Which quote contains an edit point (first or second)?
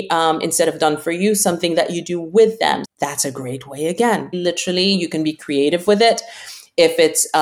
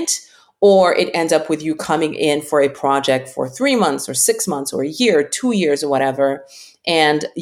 first